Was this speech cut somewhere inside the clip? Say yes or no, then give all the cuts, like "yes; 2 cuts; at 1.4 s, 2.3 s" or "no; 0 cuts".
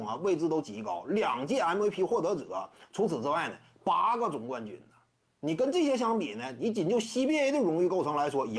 no; 0 cuts